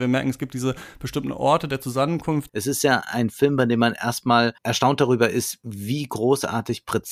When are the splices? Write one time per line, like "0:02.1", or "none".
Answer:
0:02.5
0:04.6